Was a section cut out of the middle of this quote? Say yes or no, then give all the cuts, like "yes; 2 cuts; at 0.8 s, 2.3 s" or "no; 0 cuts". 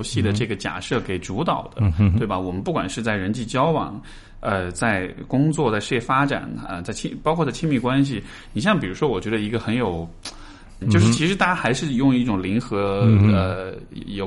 yes; 1 cut; at 10.8 s